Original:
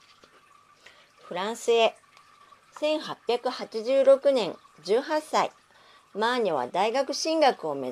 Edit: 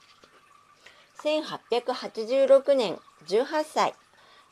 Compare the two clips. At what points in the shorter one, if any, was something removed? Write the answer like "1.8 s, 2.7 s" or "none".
1.1 s